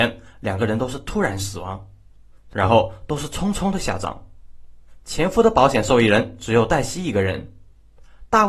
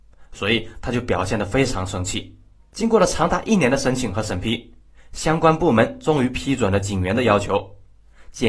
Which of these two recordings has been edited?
second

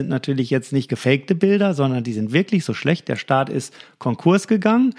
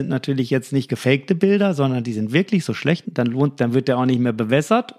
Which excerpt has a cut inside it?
second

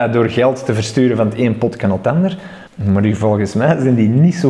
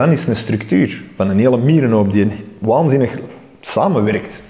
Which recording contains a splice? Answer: first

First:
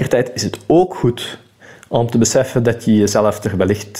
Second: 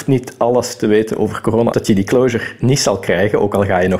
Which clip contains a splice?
second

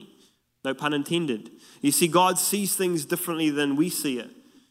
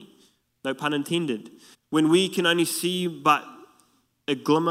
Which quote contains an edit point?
second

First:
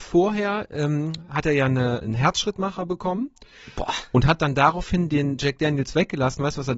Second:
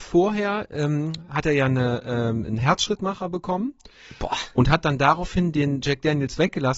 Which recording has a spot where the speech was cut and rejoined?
first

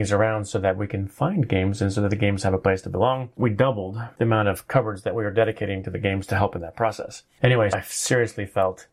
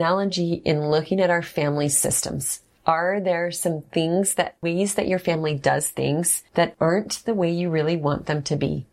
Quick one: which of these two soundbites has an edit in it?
first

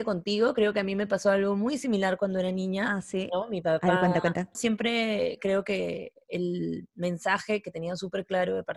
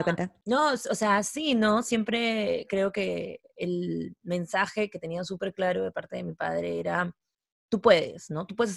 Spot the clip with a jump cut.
first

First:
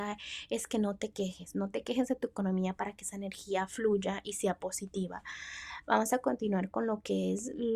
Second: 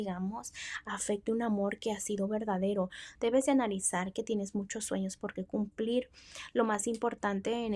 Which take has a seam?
second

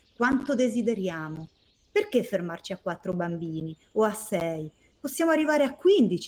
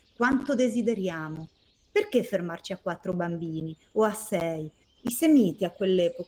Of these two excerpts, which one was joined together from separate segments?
second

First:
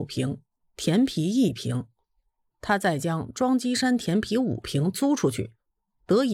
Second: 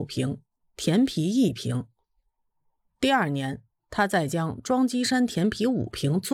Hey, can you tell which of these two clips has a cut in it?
first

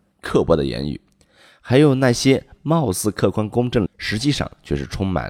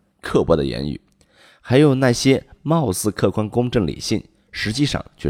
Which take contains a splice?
first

